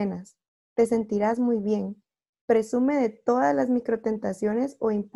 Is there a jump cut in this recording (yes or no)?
no